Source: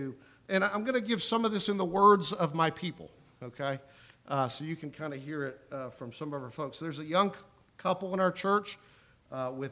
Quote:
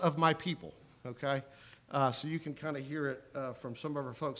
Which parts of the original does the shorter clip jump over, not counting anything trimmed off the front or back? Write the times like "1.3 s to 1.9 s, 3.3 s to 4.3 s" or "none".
none